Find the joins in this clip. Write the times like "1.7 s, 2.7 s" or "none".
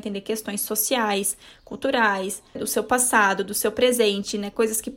2.6 s